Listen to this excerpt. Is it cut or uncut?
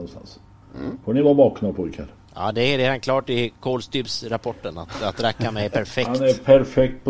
uncut